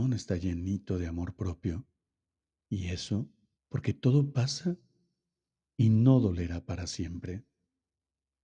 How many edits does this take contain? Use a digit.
1